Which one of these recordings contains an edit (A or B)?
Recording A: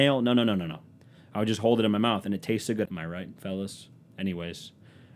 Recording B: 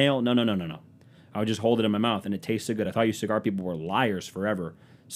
A